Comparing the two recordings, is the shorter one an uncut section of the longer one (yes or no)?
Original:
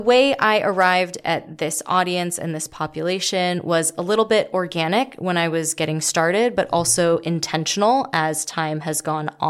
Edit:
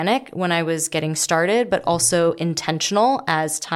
yes